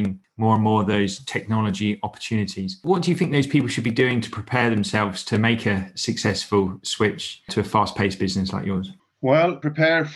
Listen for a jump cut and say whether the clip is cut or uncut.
uncut